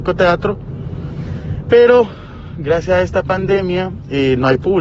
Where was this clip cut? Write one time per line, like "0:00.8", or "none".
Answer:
none